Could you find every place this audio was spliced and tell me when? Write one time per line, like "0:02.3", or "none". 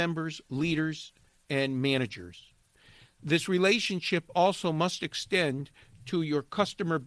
none